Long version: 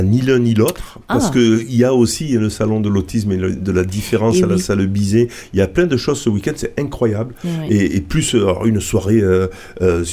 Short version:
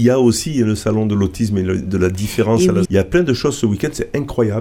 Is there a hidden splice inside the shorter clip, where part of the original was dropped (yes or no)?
yes